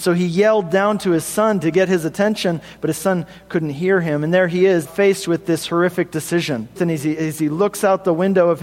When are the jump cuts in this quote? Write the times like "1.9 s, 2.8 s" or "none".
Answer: 4.8 s, 6.8 s